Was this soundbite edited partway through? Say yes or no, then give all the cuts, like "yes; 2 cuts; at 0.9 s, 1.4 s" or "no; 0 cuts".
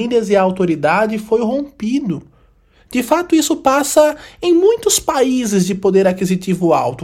no; 0 cuts